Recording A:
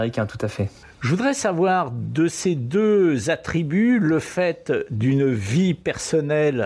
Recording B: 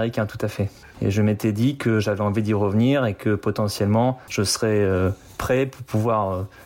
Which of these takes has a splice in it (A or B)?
B